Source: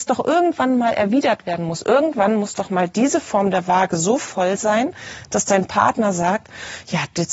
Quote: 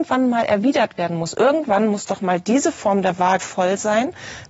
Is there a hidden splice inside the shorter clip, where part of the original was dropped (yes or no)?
yes